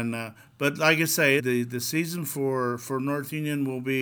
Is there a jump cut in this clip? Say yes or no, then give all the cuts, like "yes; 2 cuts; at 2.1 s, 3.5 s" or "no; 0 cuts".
yes; 1 cut; at 1.4 s